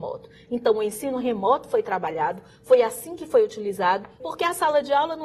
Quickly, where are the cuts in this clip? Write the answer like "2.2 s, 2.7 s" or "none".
4.2 s